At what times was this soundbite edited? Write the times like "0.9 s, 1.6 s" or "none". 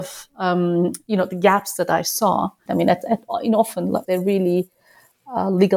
2.7 s, 4.0 s